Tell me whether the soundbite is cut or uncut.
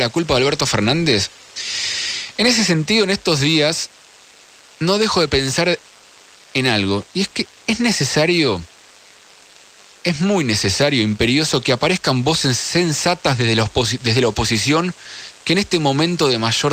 uncut